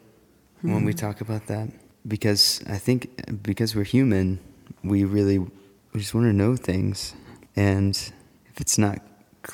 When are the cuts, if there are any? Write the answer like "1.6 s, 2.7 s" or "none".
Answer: none